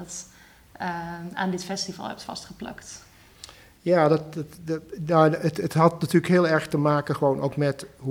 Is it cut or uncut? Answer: uncut